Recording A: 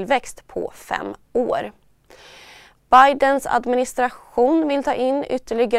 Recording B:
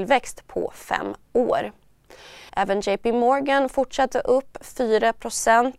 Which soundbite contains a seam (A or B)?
B